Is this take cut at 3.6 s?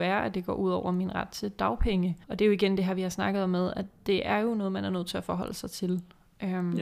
no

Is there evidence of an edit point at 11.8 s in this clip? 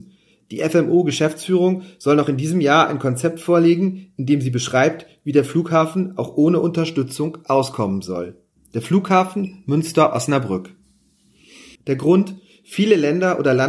yes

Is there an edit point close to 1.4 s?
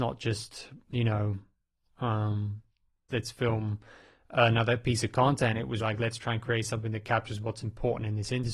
no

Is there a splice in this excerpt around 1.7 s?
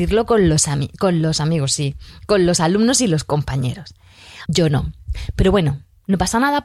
no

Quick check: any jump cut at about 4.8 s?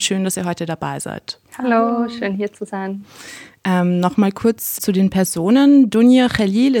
yes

